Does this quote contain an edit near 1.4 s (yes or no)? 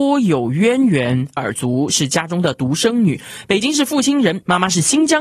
yes